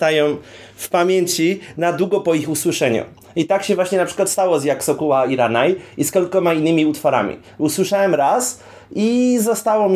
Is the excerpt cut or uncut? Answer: uncut